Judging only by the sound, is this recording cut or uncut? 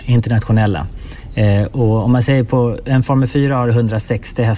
uncut